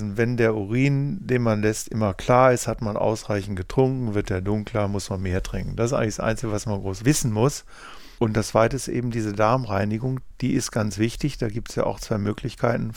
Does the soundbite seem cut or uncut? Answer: uncut